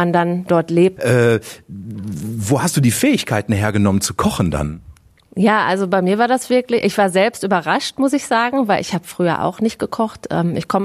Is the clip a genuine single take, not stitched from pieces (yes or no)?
no